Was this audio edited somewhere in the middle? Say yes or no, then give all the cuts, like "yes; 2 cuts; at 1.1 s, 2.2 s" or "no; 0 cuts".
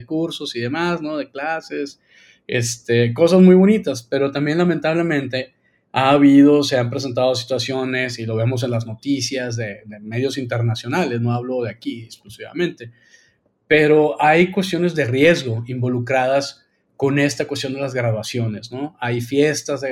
no; 0 cuts